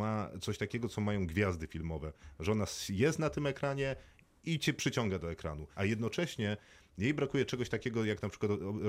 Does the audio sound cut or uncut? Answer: cut